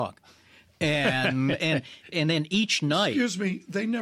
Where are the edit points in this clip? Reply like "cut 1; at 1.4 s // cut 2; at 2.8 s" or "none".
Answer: cut 1; at 2.1 s